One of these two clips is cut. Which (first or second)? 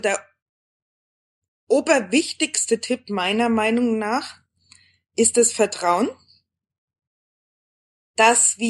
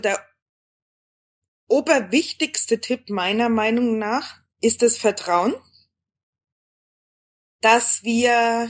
second